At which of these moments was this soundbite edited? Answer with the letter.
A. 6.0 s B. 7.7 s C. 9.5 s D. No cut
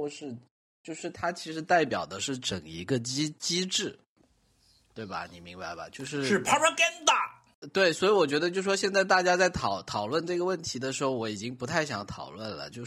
D